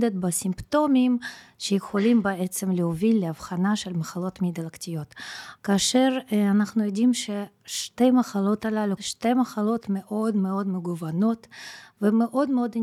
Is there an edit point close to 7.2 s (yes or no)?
no